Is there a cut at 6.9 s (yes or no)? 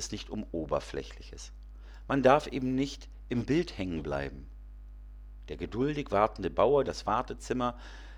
yes